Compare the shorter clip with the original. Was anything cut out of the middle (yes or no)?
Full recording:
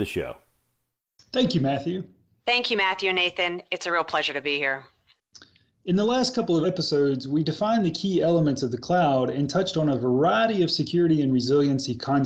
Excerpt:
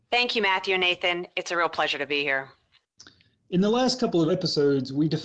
no